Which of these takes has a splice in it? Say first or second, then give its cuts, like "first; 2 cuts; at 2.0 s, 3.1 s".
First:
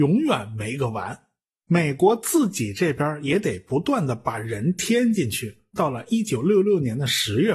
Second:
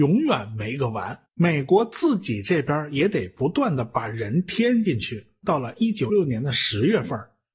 second; 2 cuts; at 1.3 s, 6.1 s